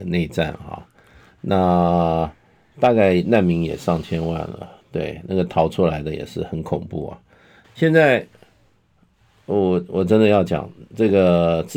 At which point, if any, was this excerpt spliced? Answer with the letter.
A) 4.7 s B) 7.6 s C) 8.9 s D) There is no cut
B